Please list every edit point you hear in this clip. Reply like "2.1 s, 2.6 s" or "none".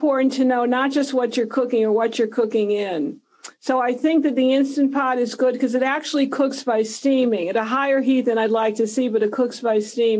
none